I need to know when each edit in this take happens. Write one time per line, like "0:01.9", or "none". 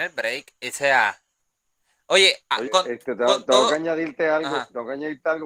0:02.6